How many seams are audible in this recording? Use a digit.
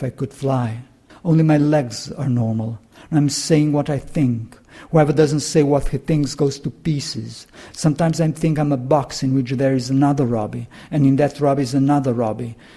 2